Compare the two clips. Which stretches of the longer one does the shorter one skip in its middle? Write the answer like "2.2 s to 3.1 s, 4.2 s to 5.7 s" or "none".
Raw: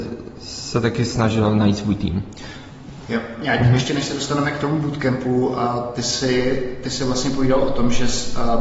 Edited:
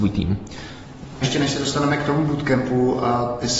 3.1 s to 3.8 s